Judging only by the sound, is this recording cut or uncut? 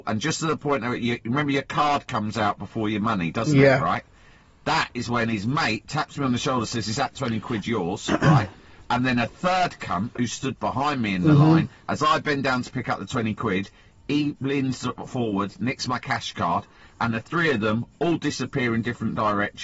uncut